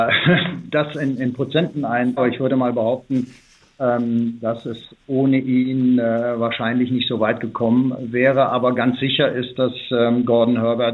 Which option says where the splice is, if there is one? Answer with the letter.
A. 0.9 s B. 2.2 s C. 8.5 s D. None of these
B